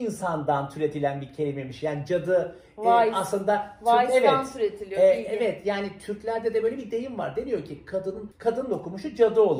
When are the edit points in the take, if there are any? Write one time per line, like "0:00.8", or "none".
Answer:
0:08.3